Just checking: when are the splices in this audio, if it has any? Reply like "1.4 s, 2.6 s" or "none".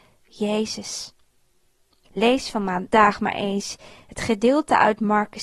2.1 s